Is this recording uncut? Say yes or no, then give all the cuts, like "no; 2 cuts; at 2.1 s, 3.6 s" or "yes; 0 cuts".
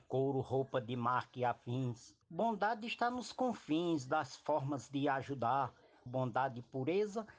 no; 2 cuts; at 2.2 s, 6.1 s